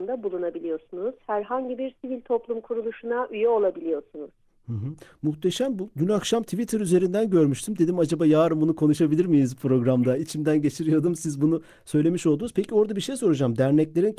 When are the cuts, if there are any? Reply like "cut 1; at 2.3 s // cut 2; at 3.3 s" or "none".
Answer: none